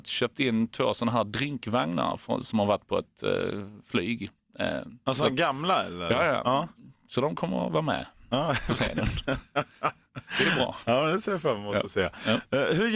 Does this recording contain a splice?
no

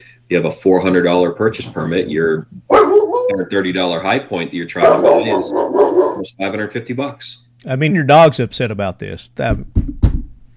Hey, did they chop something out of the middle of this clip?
yes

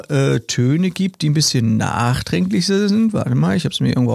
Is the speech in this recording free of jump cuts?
yes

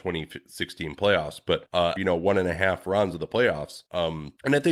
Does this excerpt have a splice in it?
yes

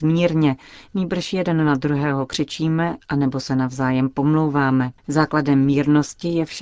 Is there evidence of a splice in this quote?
yes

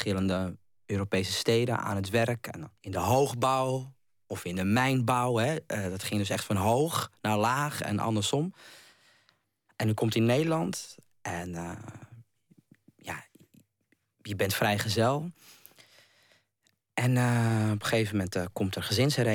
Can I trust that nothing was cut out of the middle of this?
no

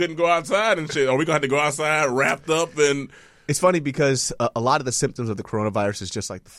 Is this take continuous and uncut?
yes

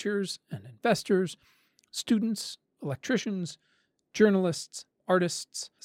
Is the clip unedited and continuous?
yes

